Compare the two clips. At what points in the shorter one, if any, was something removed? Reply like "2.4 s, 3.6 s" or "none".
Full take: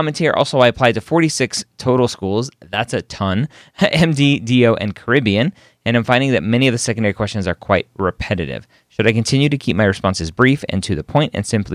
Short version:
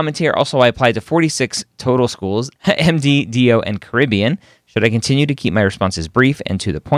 2.6 s, 4.6 s